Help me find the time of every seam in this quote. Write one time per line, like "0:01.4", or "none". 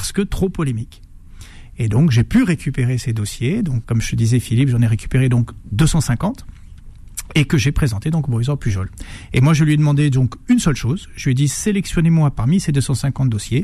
0:03.8

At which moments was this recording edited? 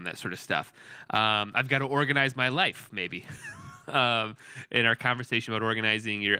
none

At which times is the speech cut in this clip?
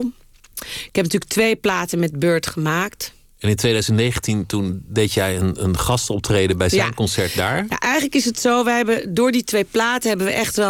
none

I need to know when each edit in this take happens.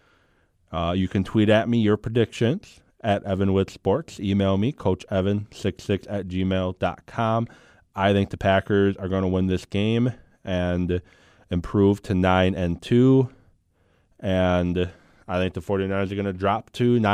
none

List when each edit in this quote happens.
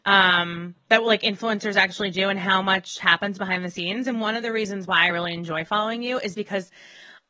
none

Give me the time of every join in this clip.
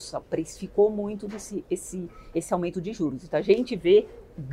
0:02.3

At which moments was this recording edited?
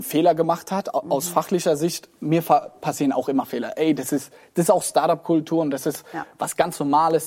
none

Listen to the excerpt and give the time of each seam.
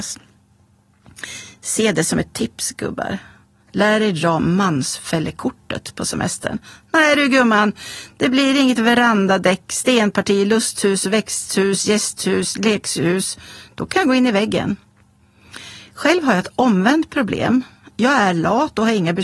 none

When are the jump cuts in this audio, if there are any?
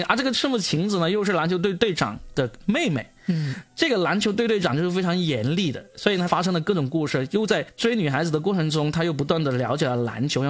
0:06.3

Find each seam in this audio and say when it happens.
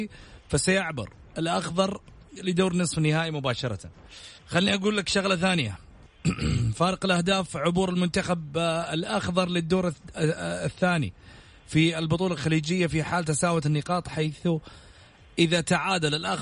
0:04.4

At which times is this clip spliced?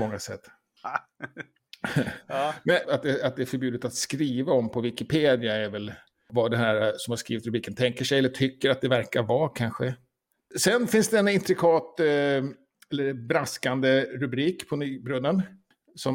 0:02.8
0:10.4

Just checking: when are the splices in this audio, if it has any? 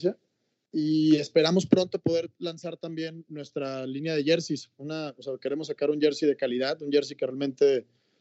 none

